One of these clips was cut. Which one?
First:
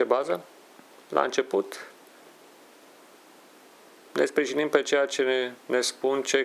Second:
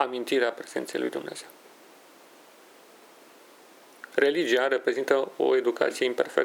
second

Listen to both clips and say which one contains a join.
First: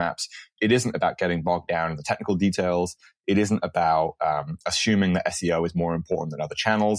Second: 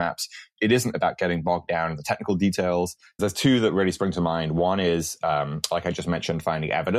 second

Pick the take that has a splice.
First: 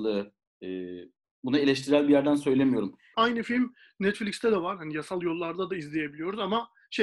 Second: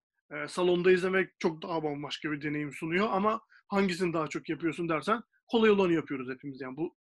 first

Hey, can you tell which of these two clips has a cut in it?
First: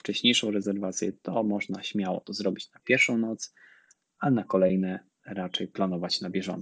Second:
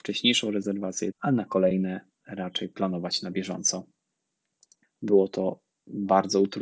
second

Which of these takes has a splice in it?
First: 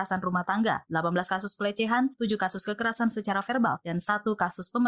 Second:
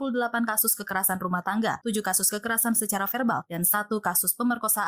second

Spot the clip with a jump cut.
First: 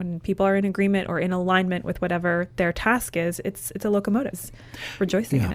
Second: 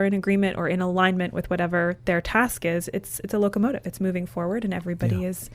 first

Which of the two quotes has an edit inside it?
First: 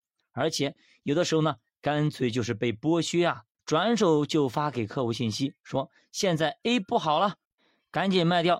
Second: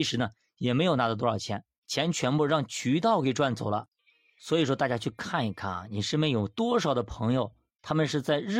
first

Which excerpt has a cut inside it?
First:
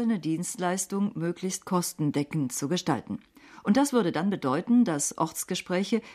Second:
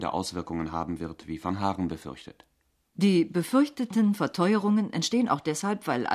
second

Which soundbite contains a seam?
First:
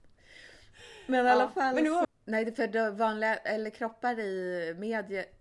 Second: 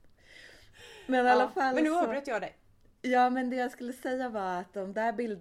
first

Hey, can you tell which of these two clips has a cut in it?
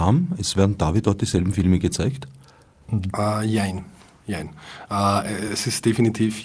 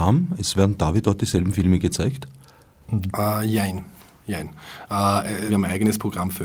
second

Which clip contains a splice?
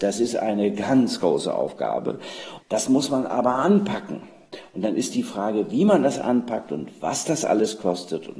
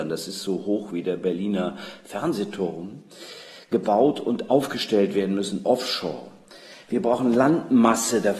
first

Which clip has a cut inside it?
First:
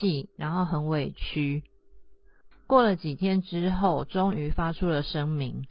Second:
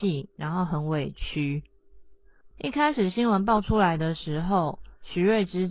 first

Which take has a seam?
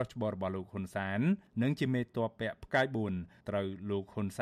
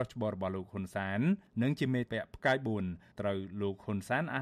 second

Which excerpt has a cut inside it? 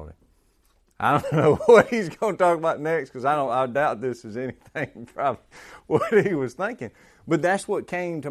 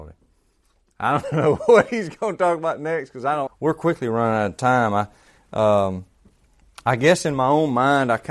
second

